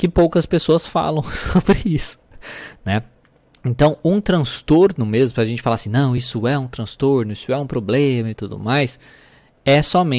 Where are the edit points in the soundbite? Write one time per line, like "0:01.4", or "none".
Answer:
none